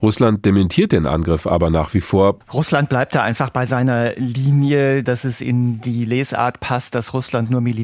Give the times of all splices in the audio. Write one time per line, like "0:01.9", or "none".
0:02.4
0:05.0